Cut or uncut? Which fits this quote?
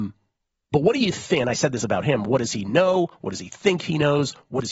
uncut